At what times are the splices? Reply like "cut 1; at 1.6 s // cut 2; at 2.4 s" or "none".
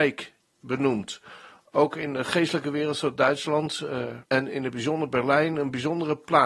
cut 1; at 4.2 s